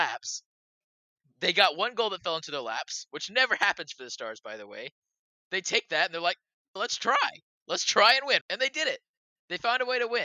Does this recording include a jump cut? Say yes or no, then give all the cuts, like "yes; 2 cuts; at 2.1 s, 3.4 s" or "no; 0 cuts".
yes; 2 cuts; at 6.8 s, 8.4 s